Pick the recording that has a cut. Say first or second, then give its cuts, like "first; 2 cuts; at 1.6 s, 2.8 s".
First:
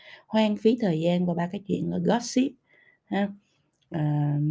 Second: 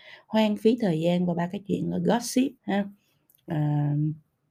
second; 1 cut; at 2.6 s